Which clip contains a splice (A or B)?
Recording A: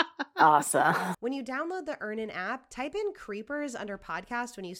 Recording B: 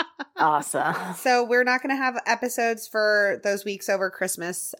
A